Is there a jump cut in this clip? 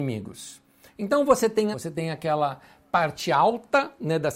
yes; 1 cut; at 1.7 s

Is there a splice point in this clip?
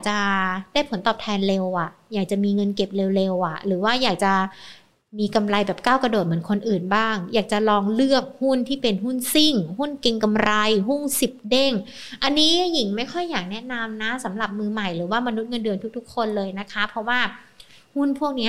no; 0 cuts

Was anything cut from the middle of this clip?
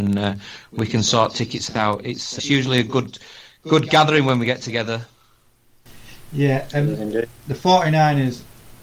yes; 1 cut; at 2.4 s

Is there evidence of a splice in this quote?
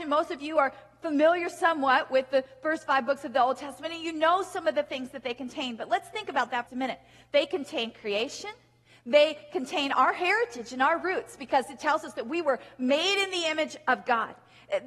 yes; 1 cut; at 6.7 s

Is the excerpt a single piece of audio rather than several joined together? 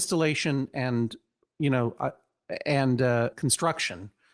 no; 1 cut; at 3.3 s

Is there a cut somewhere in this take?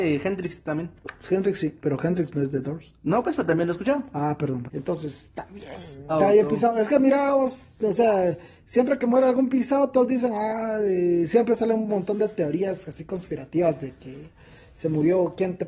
yes; 3 cuts; at 1.8 s, 4.6 s, 6.1 s

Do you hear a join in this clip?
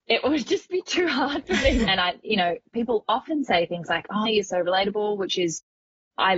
yes; 2 cuts; at 1.9 s, 4.3 s

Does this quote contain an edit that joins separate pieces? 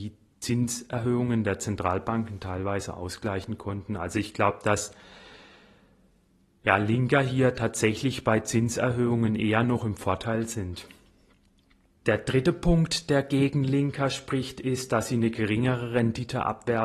no; 0 cuts

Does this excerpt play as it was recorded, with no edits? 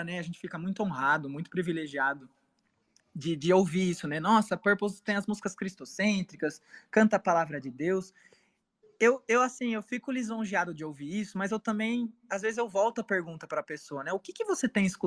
yes; 0 cuts

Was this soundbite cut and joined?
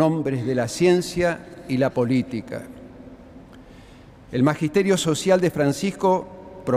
no; 0 cuts

